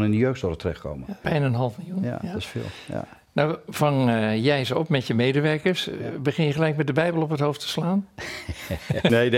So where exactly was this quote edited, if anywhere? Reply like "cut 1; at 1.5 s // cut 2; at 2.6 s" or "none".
cut 1; at 1.2 s

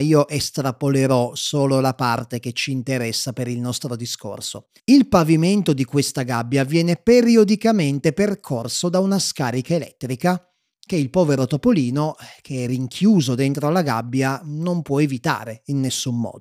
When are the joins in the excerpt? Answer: cut 1; at 4.8 s

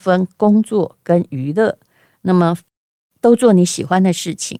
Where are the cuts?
none

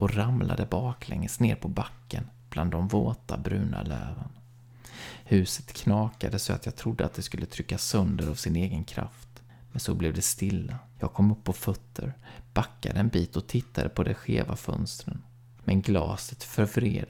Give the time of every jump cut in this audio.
cut 1; at 11.0 s // cut 2; at 15.5 s

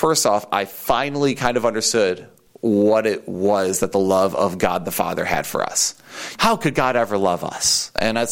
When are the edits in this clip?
cut 1; at 6.4 s

